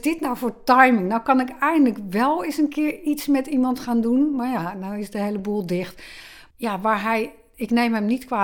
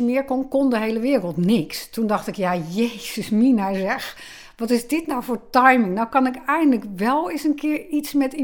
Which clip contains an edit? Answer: first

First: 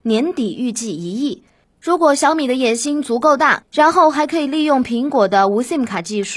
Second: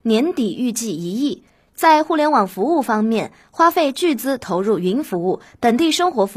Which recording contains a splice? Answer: first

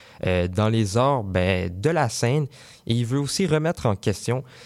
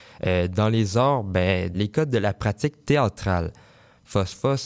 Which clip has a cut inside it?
second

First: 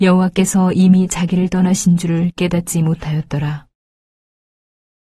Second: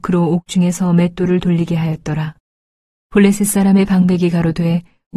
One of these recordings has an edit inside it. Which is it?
second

